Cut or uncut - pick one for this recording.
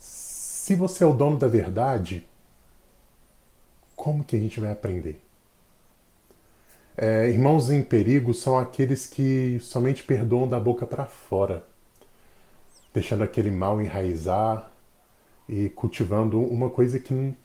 uncut